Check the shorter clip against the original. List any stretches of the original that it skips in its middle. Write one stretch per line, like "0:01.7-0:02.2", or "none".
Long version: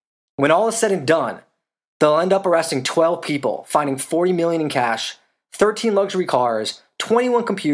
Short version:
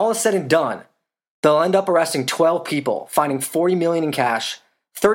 none